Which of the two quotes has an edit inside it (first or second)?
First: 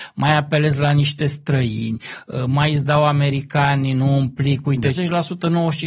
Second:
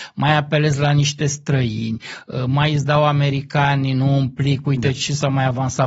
first